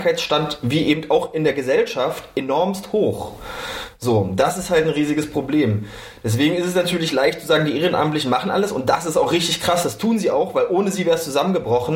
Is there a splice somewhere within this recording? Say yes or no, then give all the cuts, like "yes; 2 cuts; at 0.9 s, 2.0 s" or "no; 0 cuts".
no; 0 cuts